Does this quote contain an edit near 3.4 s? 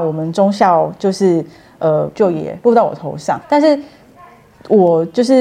yes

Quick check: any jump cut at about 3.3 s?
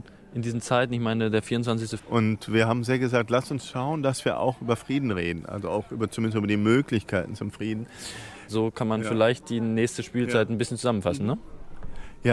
no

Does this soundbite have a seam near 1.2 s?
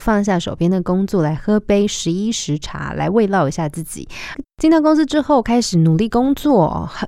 no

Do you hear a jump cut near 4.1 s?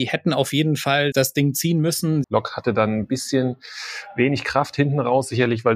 no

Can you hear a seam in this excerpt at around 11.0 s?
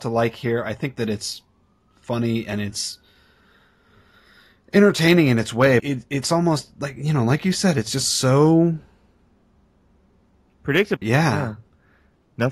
yes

